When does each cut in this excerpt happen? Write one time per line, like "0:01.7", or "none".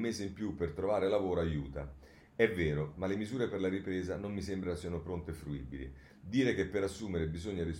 0:02.9